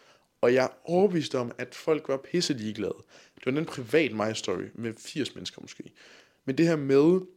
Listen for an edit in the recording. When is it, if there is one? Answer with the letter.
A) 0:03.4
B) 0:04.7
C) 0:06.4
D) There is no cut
A